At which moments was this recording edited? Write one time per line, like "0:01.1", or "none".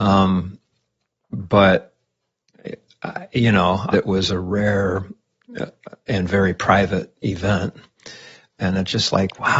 0:03.9
0:08.6